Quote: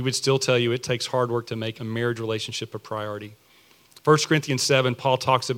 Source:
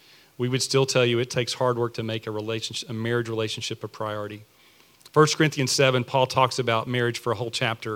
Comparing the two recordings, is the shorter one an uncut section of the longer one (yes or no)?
no